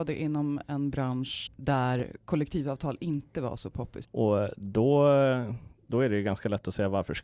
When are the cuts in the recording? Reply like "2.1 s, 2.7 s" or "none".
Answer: 1.5 s, 4.0 s